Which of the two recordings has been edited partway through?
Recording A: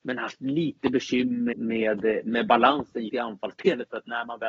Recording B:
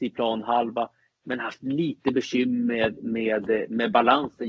A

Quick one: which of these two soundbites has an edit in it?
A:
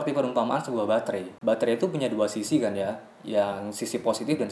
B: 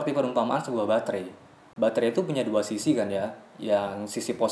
A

